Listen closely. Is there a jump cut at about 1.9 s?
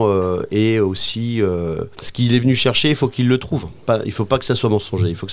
yes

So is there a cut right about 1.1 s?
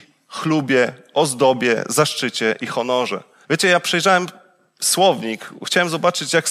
no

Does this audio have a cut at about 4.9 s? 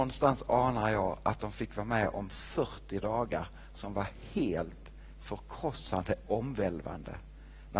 no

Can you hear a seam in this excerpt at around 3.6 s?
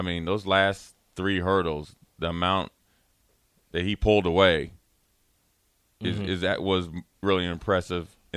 no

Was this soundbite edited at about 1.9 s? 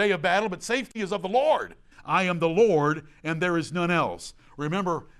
yes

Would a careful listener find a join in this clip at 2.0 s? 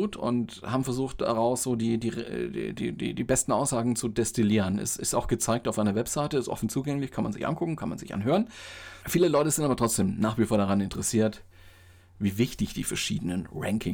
no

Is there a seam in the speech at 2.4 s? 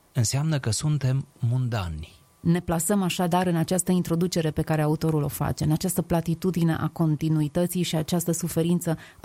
yes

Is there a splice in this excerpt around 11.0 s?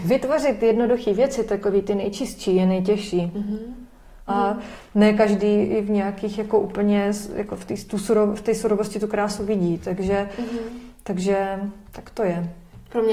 no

